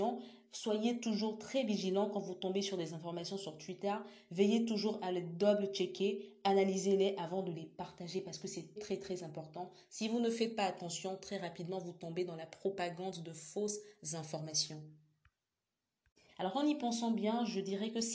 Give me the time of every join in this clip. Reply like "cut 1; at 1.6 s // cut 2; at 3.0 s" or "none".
cut 1; at 8.8 s